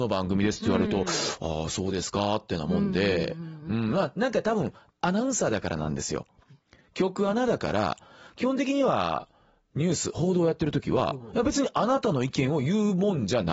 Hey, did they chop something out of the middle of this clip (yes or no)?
no